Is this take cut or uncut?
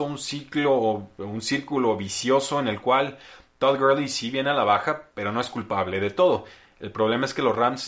uncut